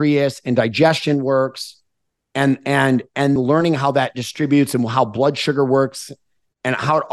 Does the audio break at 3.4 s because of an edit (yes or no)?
yes